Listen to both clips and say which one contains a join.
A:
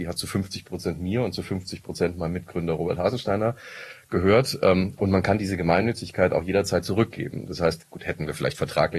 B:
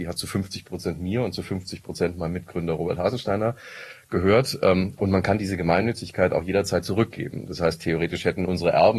A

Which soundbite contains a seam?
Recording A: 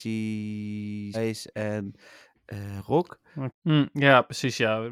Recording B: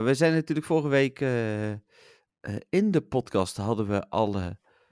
A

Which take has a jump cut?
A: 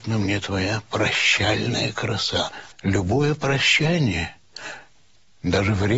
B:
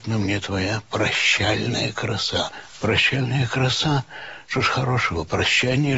A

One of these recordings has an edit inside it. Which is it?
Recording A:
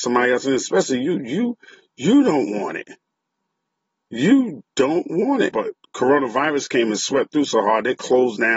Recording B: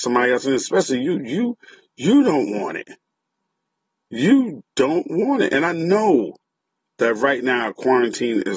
A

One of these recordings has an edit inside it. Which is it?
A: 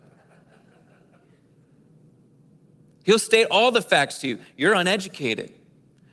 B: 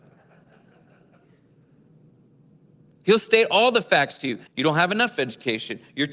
B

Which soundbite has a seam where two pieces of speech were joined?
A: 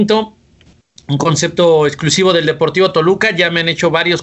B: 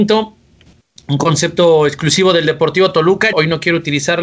B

